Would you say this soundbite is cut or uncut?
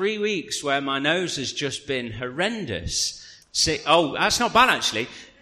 cut